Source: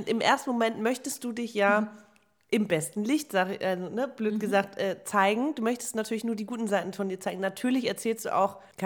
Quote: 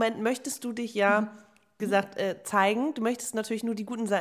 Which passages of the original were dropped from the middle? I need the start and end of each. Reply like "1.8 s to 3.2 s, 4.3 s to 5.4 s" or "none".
2.4 s to 4.4 s